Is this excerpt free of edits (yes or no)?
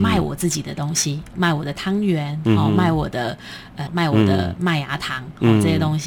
no